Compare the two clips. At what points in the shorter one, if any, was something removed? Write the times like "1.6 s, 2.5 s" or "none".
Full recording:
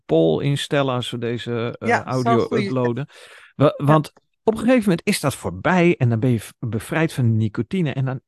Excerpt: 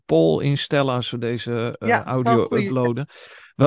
none

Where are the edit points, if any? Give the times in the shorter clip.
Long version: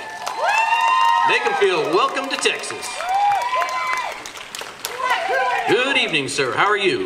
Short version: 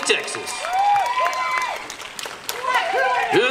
none

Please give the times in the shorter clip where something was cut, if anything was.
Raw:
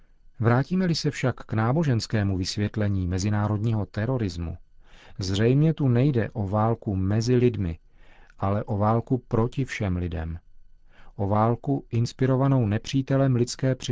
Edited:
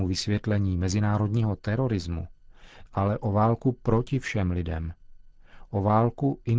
2.9 s

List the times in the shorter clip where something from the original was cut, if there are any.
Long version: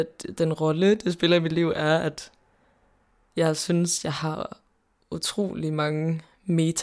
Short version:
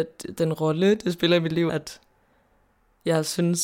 1.7 s

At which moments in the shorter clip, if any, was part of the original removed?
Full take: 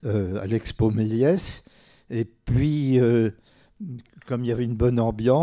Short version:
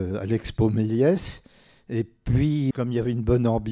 2.7 s

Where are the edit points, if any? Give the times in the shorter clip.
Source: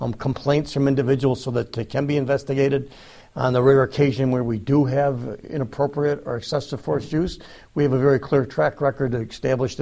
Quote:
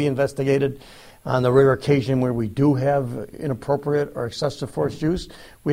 none

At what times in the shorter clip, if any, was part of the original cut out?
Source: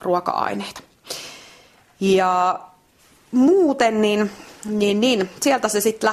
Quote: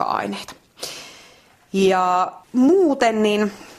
2.4 s

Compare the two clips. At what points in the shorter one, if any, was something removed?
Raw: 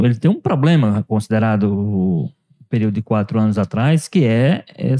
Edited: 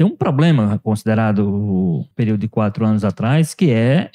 2.1 s

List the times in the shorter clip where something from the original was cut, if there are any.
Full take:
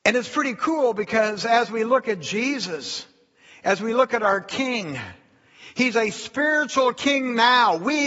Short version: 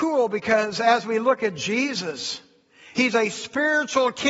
2.9 s

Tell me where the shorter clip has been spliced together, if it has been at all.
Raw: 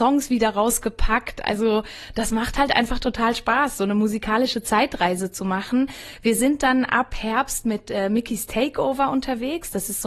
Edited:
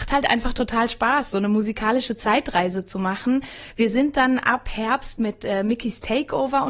none

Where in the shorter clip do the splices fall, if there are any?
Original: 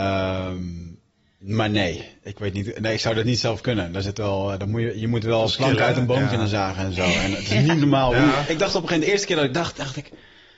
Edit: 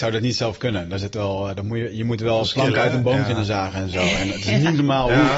none

